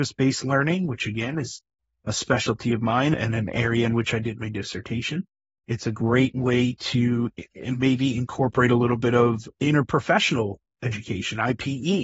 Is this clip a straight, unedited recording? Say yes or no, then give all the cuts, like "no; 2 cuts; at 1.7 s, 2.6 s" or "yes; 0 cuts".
yes; 0 cuts